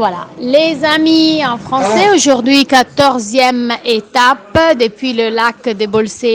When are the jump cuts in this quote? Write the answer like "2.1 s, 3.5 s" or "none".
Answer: none